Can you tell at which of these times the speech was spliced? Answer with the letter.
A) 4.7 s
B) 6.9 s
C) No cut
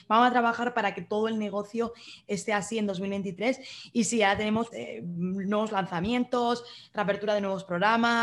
A